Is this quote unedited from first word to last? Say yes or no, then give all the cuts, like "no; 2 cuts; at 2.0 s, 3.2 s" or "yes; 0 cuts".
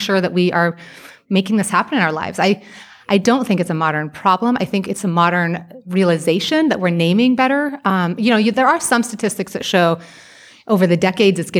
yes; 0 cuts